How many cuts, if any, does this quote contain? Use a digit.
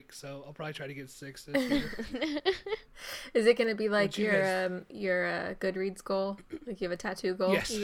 0